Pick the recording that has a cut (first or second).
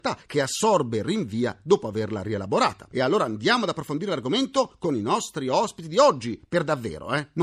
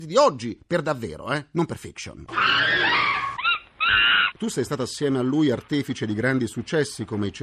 second